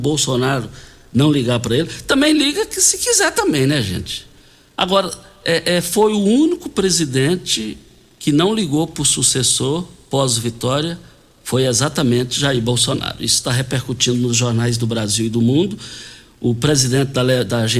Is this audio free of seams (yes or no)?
yes